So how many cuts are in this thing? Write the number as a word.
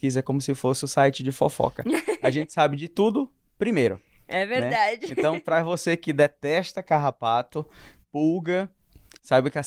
zero